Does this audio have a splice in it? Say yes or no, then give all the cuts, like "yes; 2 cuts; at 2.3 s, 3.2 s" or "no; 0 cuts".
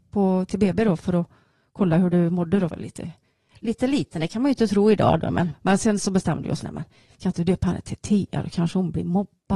yes; 3 cuts; at 2.7 s, 5.5 s, 6.6 s